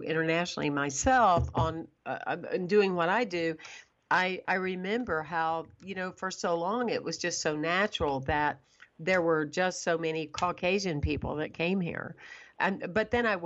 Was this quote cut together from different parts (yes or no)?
no